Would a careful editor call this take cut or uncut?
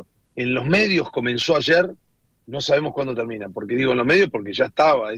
uncut